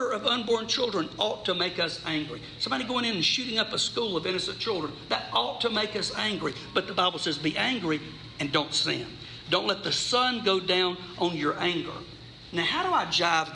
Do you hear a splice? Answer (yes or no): no